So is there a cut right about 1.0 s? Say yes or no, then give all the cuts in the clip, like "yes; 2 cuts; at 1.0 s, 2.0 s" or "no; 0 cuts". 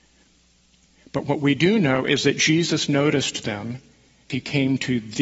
no; 1 cut; at 4.3 s